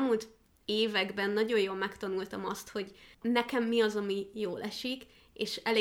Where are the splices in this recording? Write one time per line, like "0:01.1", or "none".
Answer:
0:03.1